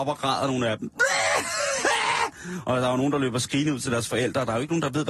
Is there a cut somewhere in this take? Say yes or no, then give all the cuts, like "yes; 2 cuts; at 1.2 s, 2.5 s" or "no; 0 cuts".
no; 0 cuts